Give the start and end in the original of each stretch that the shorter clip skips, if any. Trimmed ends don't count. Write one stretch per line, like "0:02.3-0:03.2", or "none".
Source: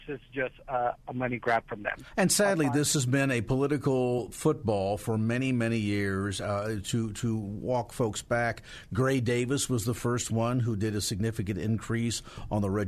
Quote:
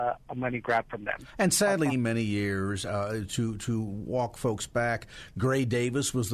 0:02.7-0:05.4